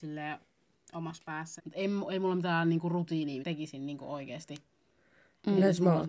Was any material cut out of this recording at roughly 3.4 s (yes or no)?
yes